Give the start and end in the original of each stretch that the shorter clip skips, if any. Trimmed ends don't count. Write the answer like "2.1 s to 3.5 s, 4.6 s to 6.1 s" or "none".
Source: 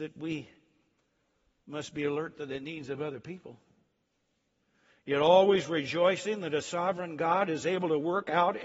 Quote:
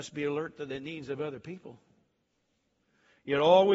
none